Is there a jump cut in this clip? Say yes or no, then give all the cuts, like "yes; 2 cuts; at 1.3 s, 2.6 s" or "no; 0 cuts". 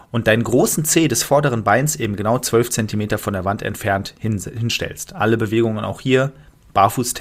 no; 0 cuts